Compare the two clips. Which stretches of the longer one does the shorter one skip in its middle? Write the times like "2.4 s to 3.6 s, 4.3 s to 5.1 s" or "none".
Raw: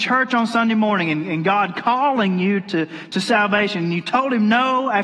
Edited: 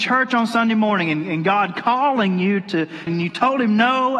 3.1 s to 3.8 s